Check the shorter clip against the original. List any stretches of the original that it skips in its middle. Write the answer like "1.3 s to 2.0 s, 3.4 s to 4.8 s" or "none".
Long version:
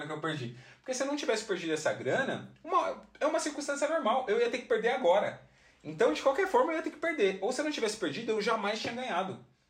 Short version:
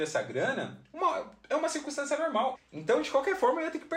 4.3 s to 5.7 s